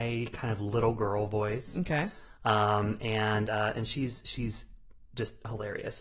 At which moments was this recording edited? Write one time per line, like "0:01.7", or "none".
none